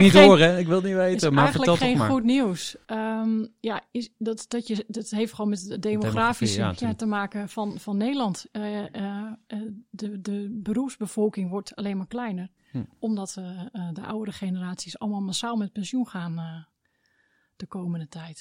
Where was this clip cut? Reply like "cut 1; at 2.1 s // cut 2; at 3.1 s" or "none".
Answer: none